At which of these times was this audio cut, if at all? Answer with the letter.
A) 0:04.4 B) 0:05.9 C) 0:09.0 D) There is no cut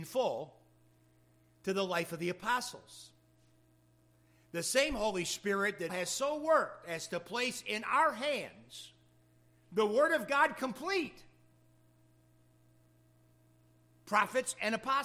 B